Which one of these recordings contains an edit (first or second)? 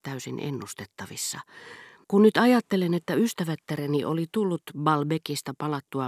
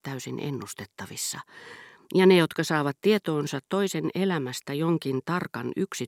first